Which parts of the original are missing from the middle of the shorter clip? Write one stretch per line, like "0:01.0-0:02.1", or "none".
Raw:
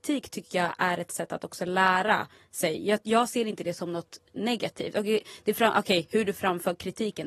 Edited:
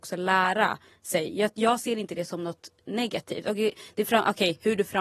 none